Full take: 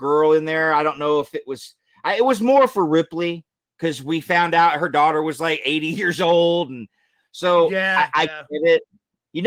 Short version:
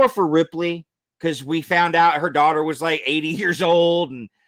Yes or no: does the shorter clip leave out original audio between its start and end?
no